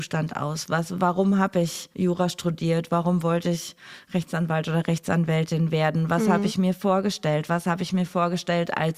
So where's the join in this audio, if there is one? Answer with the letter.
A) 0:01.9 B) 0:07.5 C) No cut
A